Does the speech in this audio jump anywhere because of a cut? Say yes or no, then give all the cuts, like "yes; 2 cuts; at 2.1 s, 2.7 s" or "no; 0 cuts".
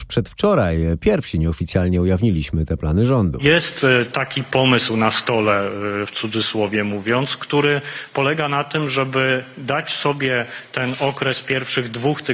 no; 0 cuts